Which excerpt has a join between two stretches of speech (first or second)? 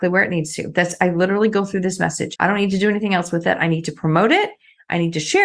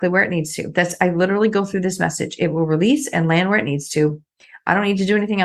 first